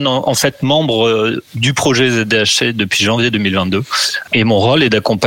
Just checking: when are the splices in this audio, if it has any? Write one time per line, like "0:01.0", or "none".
0:01.5
0:04.2